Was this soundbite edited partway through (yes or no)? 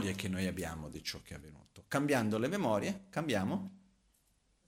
no